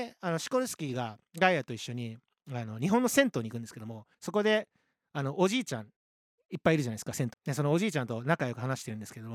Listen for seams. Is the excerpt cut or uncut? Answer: cut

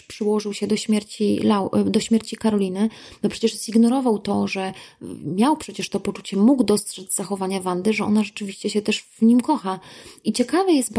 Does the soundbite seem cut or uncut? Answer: uncut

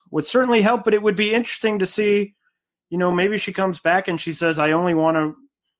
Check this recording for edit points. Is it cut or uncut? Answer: uncut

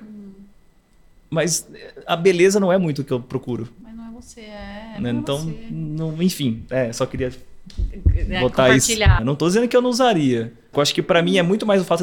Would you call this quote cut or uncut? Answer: cut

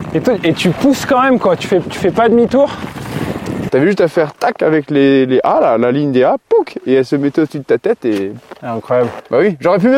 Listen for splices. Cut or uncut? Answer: cut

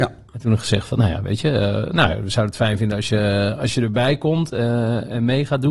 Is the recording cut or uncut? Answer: uncut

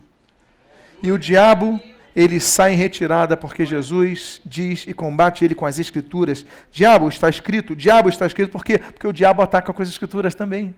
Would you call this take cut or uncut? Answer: uncut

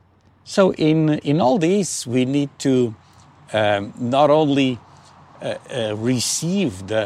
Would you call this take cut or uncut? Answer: uncut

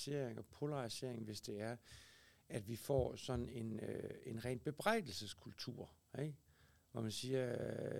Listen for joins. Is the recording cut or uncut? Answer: uncut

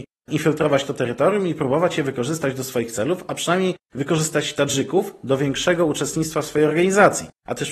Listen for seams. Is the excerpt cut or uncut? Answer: uncut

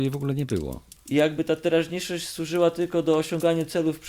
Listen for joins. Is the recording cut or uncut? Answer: cut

